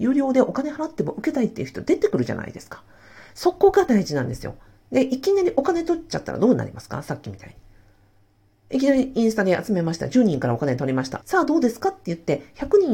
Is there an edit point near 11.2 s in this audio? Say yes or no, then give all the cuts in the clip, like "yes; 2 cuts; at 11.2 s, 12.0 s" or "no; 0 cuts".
yes; 1 cut; at 11.2 s